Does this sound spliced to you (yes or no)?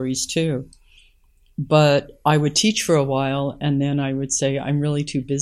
no